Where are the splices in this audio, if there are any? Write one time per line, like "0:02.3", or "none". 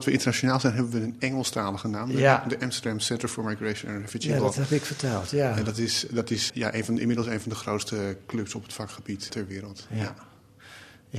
0:06.5
0:09.3